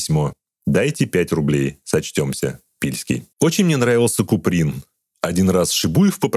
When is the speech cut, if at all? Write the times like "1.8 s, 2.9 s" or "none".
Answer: 3.3 s